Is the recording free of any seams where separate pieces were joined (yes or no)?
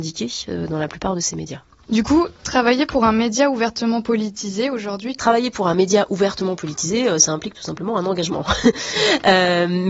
no